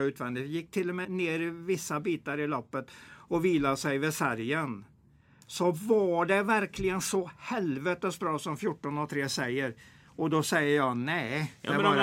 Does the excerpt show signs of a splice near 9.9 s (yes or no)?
no